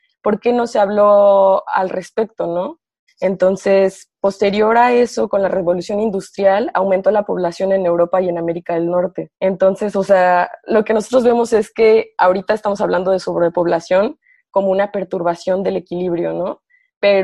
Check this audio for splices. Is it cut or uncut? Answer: cut